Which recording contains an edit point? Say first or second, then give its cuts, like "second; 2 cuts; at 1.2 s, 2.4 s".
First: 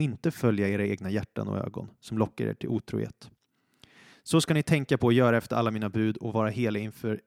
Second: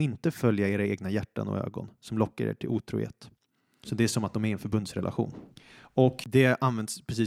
second; 1 cut; at 3.8 s